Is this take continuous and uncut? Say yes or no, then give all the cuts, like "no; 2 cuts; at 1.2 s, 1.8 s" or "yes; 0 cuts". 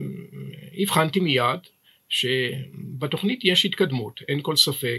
yes; 0 cuts